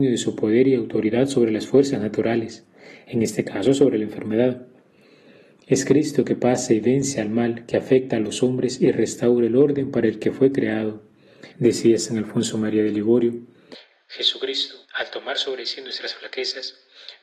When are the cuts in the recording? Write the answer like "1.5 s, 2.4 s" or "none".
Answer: 11.5 s, 14.8 s